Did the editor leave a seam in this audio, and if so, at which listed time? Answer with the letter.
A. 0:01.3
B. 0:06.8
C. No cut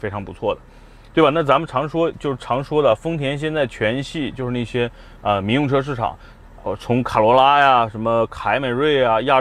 C